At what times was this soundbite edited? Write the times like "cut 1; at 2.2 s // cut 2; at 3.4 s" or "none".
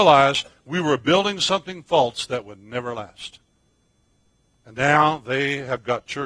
none